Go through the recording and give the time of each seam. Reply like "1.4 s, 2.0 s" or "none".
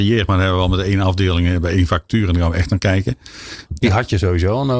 3.7 s